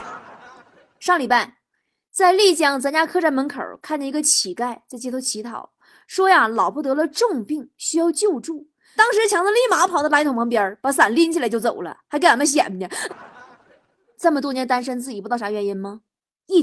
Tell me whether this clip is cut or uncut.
cut